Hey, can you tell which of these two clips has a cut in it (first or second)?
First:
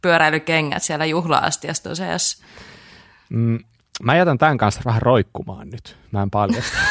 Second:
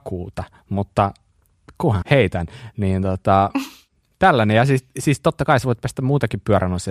second